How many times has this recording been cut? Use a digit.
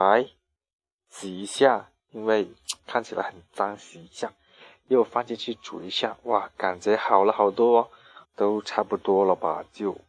1